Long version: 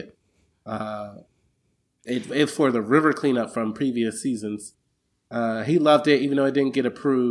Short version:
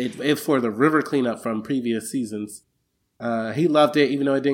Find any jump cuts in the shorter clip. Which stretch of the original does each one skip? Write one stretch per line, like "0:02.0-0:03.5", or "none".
none